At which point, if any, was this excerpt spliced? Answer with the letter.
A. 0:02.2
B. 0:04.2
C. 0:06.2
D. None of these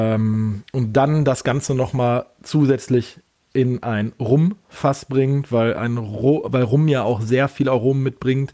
D